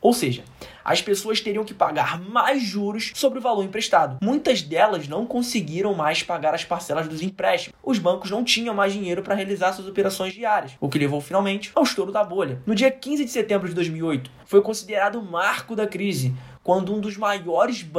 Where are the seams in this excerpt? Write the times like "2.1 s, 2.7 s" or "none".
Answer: 7.7 s, 16.6 s